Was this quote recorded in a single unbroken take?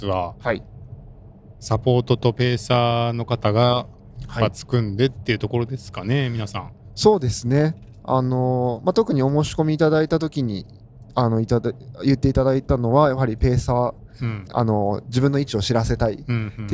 no; 1 cut; at 14.5 s

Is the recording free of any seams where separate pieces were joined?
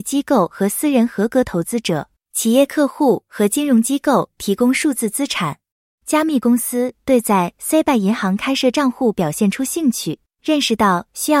no; 1 cut; at 5.9 s

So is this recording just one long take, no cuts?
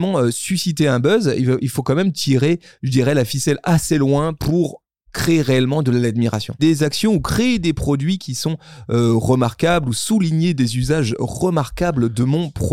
no; 1 cut; at 6.6 s

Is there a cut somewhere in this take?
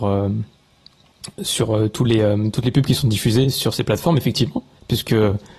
no; 0 cuts

